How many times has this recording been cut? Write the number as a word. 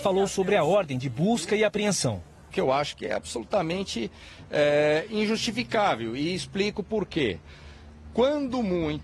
zero